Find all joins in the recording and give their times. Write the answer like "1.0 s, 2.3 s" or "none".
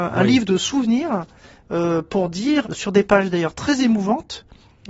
2.6 s